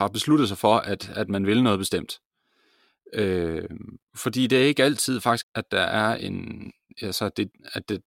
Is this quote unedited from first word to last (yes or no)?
no